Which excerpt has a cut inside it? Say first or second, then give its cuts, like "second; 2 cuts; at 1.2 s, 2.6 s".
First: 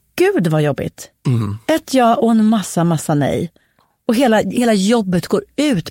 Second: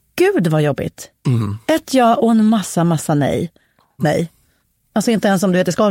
second; 1 cut; at 4.0 s